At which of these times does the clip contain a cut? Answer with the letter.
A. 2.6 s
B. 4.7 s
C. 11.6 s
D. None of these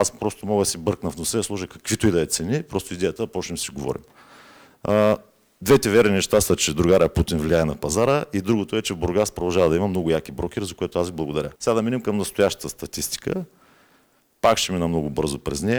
C